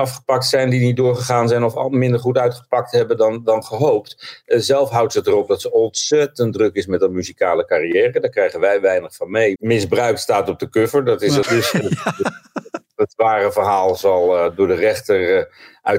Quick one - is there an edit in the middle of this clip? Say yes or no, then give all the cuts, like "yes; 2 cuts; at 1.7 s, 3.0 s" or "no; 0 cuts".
yes; 2 cuts; at 9.6 s, 11.4 s